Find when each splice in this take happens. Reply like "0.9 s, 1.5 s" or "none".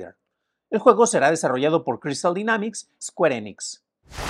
3.0 s